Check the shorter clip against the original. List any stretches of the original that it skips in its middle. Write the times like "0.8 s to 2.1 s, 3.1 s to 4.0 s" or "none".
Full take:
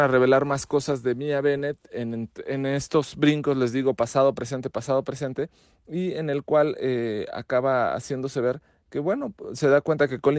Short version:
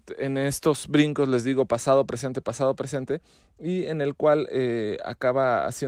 none